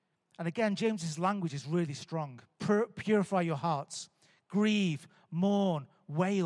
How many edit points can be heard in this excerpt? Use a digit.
1